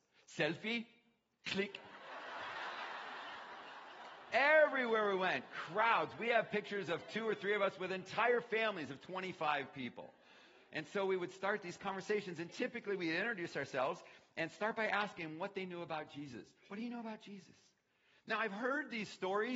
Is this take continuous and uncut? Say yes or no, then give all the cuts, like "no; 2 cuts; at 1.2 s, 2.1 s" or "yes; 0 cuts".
yes; 0 cuts